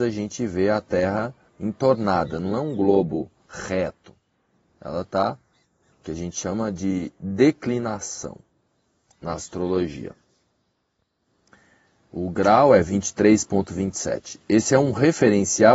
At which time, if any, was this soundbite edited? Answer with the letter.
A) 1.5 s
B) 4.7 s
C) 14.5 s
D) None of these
A